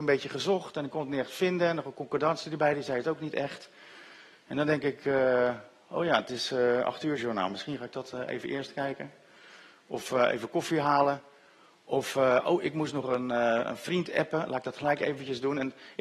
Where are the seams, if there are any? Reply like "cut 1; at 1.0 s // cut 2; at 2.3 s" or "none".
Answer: none

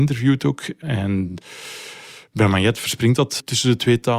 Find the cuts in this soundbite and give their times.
none

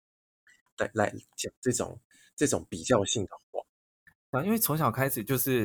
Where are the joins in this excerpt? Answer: none

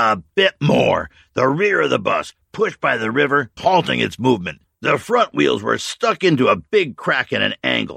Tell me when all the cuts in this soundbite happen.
cut 1; at 3.6 s

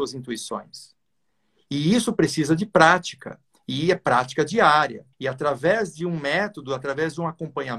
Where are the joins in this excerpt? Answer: cut 1; at 5.1 s

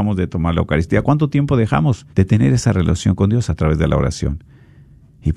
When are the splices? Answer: cut 1; at 1.0 s // cut 2; at 2.1 s

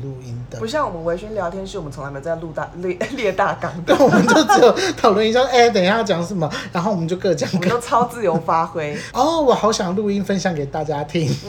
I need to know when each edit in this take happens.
cut 1; at 9.1 s

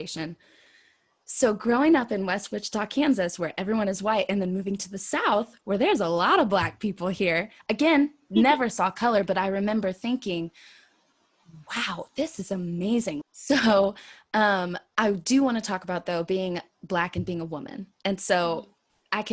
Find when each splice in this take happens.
cut 1; at 13.2 s

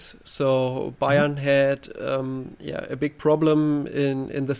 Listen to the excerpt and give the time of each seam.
none

